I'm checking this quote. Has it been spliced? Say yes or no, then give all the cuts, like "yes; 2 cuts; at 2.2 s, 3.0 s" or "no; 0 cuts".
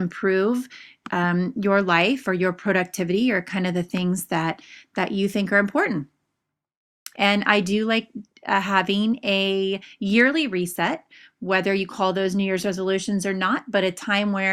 yes; 1 cut; at 7.1 s